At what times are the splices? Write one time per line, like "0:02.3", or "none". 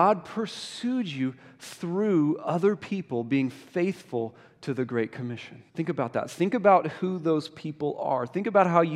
0:05.7